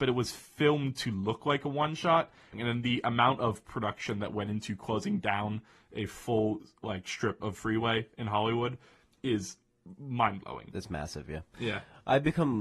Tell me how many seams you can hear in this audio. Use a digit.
1